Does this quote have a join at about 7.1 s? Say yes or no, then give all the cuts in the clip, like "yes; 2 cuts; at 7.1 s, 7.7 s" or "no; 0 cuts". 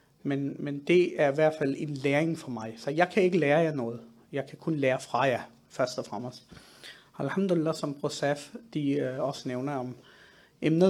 no; 0 cuts